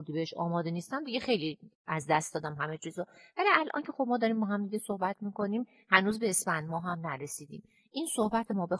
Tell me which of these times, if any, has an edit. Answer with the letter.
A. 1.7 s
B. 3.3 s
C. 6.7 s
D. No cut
A